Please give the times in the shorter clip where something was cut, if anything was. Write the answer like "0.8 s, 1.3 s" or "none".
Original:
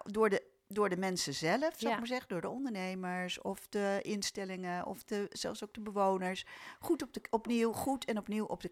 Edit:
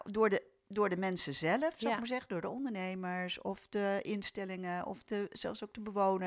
none